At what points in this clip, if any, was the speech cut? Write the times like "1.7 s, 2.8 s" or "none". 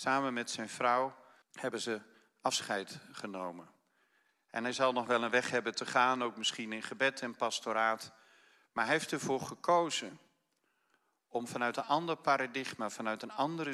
1.4 s